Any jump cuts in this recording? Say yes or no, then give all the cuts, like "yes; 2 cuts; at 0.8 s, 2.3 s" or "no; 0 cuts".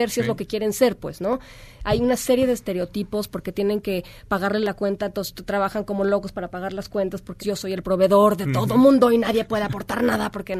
yes; 1 cut; at 7.4 s